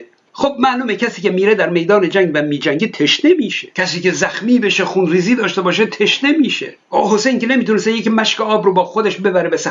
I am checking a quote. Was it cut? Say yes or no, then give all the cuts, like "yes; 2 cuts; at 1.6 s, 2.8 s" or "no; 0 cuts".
yes; 2 cuts; at 3.7 s, 6.8 s